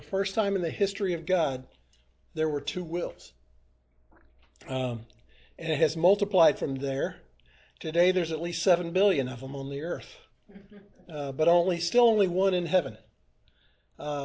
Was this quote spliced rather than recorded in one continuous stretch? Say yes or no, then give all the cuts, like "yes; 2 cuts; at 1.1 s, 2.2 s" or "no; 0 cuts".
no; 0 cuts